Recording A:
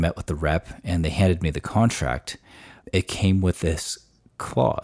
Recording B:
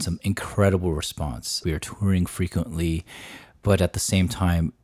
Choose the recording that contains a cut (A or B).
B